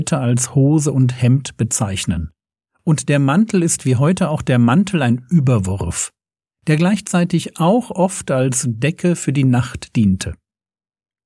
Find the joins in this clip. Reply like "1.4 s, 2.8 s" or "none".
none